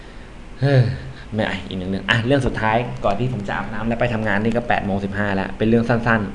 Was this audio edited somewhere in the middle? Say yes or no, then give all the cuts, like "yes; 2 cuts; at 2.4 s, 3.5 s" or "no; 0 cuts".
no; 0 cuts